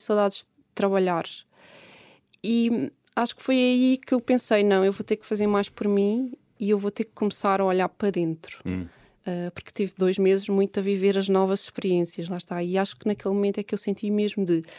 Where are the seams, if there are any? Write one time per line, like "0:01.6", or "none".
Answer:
none